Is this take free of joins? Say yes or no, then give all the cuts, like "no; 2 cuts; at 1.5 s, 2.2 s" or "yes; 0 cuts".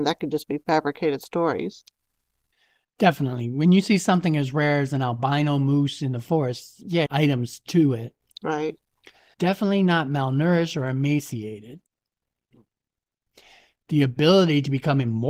no; 2 cuts; at 7.1 s, 9.3 s